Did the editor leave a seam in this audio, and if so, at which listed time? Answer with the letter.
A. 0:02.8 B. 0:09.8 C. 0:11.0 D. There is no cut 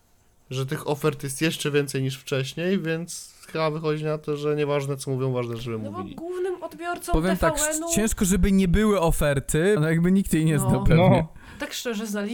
B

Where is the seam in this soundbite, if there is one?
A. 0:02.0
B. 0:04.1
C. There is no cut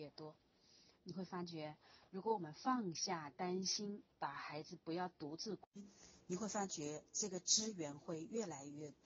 C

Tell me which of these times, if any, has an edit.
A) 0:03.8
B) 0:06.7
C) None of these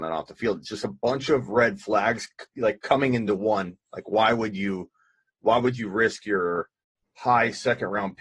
C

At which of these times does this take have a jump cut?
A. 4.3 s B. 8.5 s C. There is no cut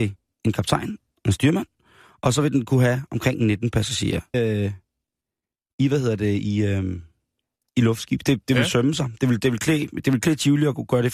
A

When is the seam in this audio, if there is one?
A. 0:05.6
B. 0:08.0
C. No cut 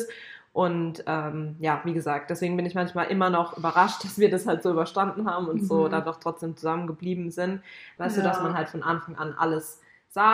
B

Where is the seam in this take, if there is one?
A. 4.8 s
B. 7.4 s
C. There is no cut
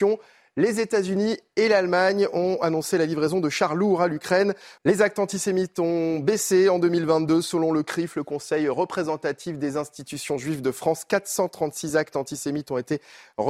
A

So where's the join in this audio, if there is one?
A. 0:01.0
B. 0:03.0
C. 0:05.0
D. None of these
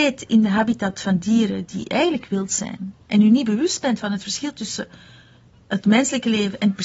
B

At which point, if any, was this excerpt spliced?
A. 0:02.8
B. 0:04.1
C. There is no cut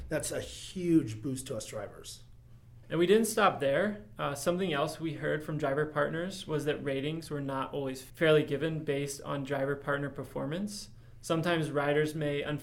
A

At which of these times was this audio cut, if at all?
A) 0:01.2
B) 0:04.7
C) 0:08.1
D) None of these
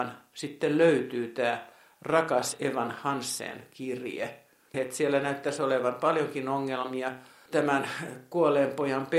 B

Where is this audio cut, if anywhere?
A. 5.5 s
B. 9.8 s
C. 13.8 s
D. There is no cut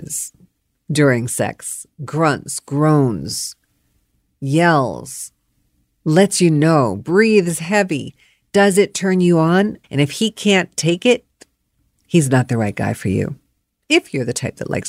B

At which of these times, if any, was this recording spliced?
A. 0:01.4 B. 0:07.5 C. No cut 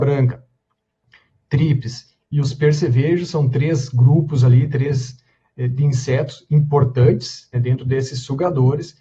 B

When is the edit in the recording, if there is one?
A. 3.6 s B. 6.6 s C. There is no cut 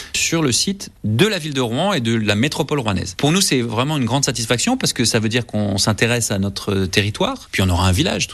C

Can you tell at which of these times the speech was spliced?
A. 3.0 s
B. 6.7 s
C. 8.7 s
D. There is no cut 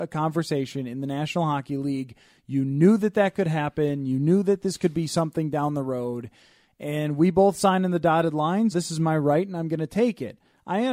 C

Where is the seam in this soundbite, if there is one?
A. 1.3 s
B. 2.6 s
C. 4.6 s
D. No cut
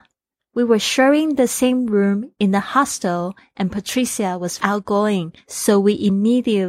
C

